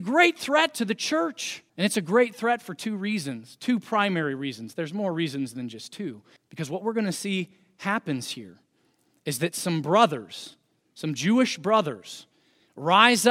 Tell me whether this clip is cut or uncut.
cut